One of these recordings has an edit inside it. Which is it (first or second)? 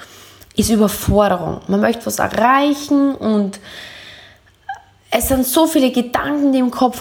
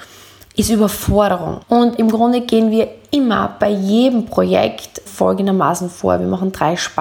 second